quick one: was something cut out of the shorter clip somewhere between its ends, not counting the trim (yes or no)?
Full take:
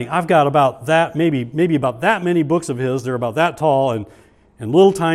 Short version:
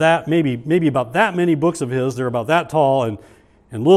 no